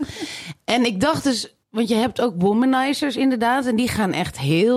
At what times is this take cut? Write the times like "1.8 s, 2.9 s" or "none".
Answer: 1.6 s